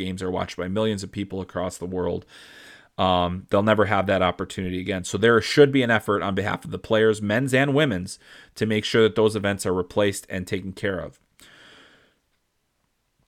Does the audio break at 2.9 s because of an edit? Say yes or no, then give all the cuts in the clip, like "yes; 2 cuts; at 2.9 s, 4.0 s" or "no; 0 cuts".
no; 0 cuts